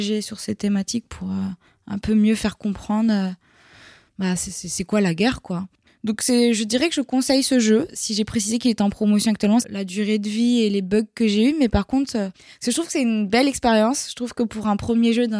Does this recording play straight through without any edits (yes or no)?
no